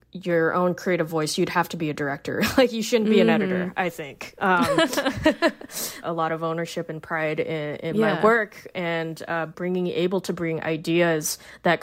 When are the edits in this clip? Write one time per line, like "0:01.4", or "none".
0:06.0